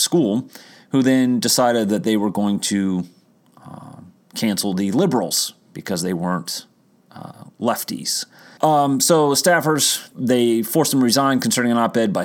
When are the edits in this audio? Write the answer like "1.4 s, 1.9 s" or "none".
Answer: 8.6 s, 10.1 s